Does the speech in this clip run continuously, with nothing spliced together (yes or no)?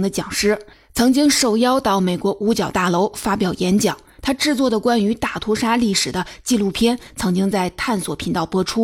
yes